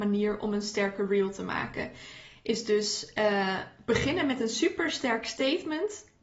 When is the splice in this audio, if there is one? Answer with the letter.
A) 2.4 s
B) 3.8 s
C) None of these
C